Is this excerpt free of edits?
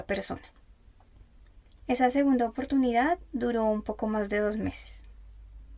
no; 1 cut; at 1.8 s

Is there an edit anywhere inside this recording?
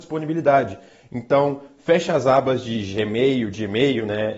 no; 0 cuts

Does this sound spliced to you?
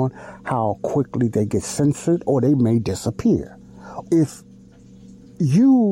yes; 1 cut; at 4.1 s

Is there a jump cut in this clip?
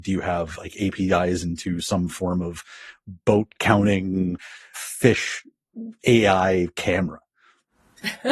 no; 0 cuts

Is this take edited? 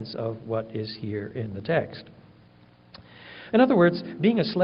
yes; 1 cut; at 3.5 s

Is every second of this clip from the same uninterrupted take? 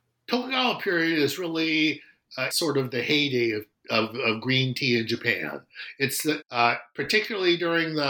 no; 2 cuts; at 2.5 s, 6.4 s

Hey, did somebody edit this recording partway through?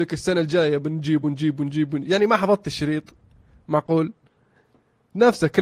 no; 0 cuts

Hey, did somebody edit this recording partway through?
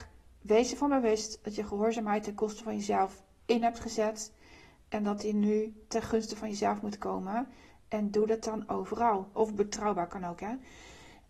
yes; 1 cut; at 9.3 s

